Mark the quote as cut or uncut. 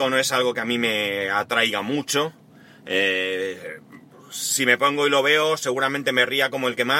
uncut